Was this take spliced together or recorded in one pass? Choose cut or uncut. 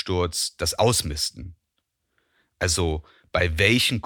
uncut